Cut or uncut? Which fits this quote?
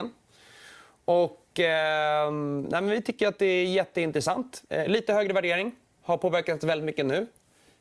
uncut